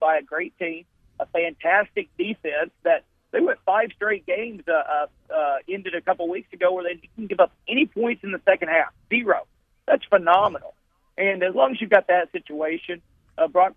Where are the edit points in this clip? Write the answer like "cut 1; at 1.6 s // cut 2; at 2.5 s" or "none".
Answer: none